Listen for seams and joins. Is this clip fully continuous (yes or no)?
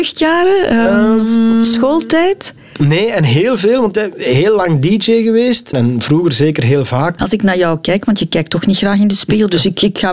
no